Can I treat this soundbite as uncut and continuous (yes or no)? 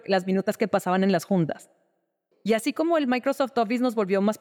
no